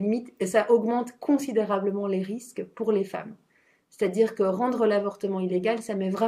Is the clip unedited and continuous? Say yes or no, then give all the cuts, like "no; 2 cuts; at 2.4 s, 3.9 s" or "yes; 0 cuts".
yes; 0 cuts